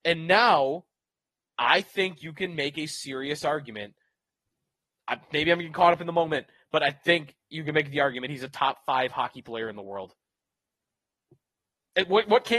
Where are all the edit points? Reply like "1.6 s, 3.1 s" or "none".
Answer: none